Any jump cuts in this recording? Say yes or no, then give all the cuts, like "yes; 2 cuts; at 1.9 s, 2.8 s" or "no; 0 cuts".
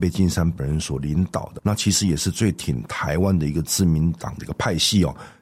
yes; 1 cut; at 1.6 s